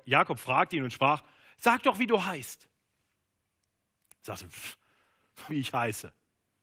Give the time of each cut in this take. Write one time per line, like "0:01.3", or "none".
0:05.5